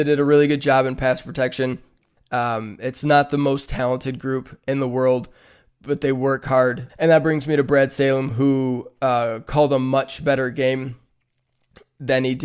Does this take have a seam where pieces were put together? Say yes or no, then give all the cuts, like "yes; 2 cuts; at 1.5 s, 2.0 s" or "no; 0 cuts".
yes; 2 cuts; at 2.2 s, 6.9 s